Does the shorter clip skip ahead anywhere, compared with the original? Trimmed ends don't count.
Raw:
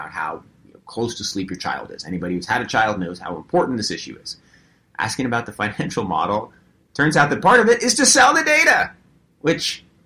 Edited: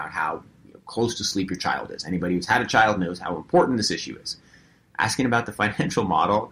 no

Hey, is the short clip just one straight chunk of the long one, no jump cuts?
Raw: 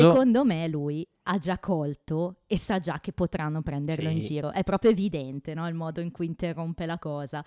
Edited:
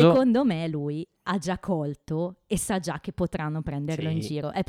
yes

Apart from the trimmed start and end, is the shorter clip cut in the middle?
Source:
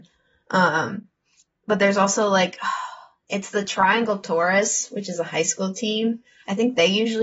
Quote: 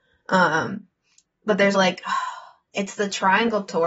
yes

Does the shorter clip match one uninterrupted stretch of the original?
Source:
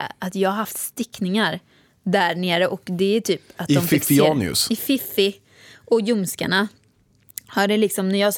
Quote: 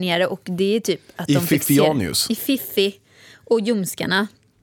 yes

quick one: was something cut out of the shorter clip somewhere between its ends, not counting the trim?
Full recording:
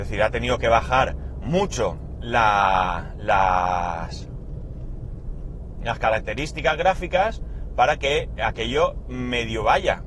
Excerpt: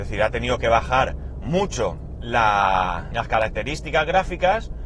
yes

